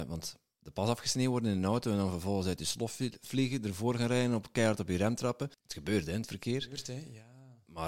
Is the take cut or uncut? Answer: cut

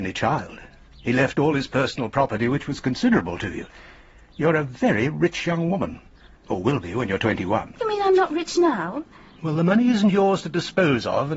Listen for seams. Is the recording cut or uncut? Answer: uncut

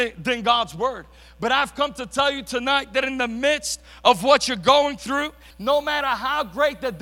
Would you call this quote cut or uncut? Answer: cut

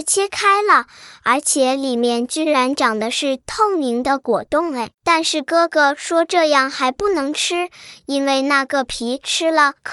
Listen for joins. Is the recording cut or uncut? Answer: cut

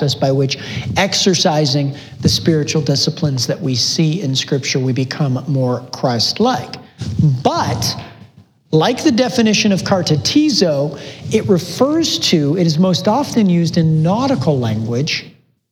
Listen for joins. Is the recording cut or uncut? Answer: uncut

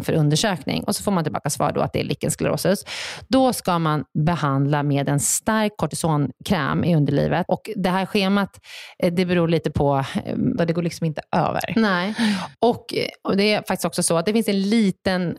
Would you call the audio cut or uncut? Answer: cut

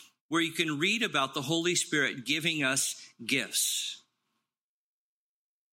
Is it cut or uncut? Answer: uncut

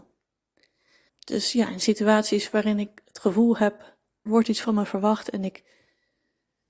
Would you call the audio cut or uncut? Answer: cut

